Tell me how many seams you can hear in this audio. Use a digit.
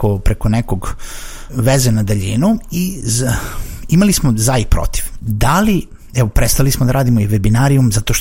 2